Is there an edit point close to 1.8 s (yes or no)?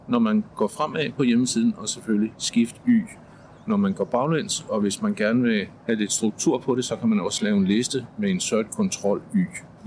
no